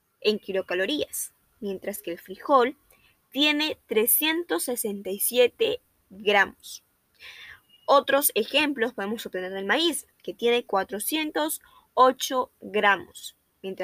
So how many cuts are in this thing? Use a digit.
0